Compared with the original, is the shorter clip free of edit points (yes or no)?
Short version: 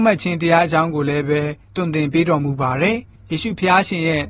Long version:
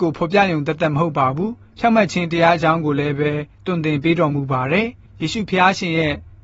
yes